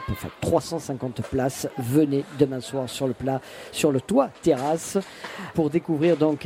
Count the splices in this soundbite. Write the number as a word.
one